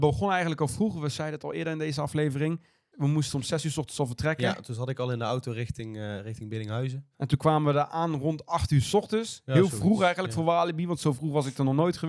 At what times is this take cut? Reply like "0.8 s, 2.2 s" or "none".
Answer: none